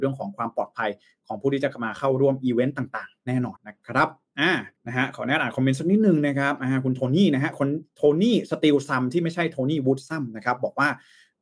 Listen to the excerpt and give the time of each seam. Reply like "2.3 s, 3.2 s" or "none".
3.6 s, 4.8 s